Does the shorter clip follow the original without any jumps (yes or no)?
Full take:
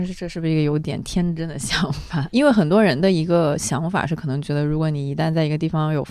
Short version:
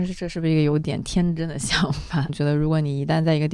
no